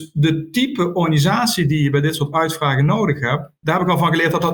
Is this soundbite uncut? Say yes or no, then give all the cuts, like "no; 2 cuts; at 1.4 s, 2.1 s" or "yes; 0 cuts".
no; 1 cut; at 3.6 s